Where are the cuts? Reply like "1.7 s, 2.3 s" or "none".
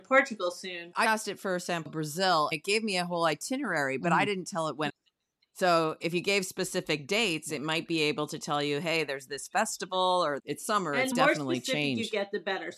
0.9 s